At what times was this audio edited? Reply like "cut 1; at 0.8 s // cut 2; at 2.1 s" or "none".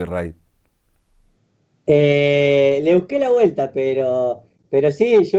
none

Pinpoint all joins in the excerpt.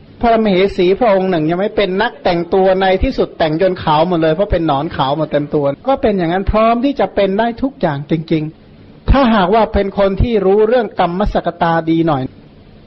cut 1; at 5.8 s // cut 2; at 8.6 s

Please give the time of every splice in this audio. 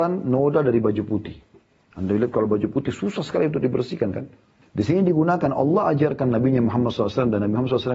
cut 1; at 4.6 s

